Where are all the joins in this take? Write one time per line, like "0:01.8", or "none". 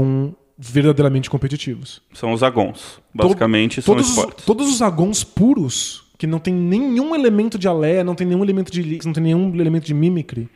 0:09.0

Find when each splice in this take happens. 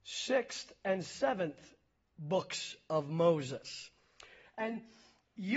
0:04.4

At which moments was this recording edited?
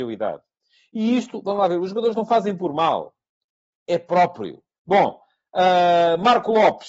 0:04.7

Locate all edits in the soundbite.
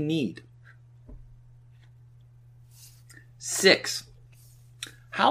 none

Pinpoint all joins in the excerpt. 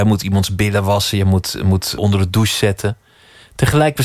0:02.0

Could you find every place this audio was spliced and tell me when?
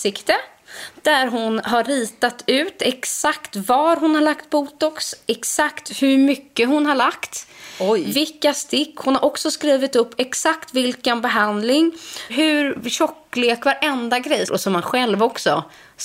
0:12.3
0:14.5

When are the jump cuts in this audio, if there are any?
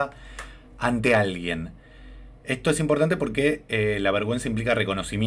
none

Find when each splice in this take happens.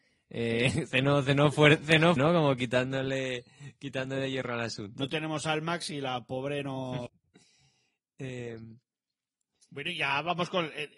0:02.2
0:07.1

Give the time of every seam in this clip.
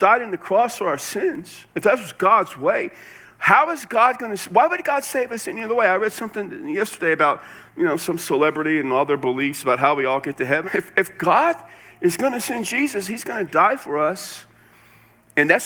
0:10.6

